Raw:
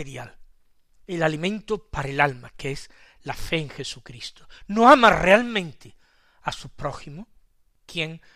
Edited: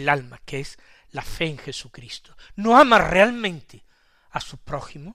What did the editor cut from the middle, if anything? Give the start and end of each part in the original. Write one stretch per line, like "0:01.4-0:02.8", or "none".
none